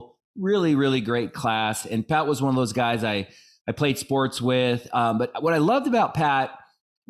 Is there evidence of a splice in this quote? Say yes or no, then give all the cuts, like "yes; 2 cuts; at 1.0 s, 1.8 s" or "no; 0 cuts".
no; 0 cuts